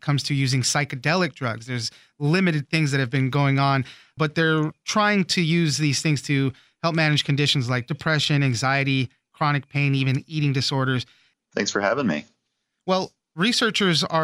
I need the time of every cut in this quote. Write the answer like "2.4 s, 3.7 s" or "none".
11.3 s